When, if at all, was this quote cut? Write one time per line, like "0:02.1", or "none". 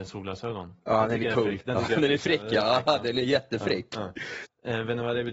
0:04.4